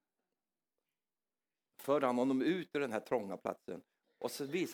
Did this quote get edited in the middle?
no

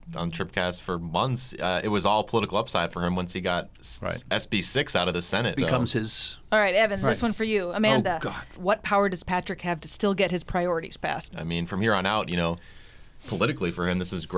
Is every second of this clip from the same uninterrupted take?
no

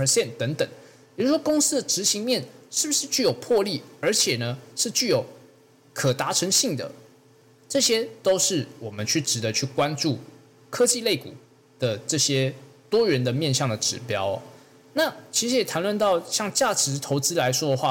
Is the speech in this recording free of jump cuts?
yes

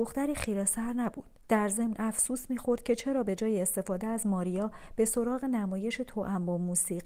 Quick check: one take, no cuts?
no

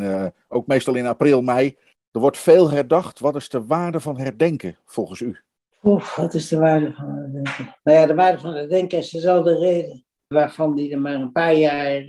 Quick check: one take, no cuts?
no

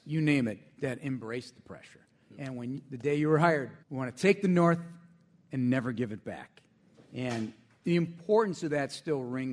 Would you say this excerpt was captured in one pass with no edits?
no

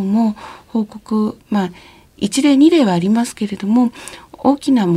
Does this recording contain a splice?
no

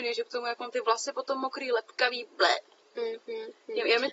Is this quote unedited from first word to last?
yes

